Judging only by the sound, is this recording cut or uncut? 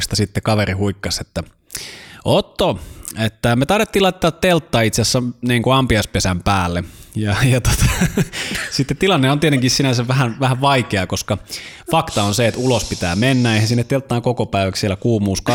uncut